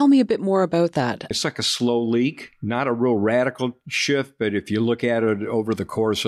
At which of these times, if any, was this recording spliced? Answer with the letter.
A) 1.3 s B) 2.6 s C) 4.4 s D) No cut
A